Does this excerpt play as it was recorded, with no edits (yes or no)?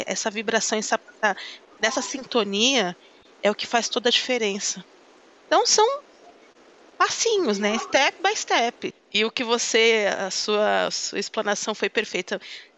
no